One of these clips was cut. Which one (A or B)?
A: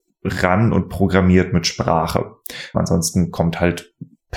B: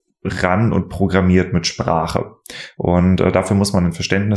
A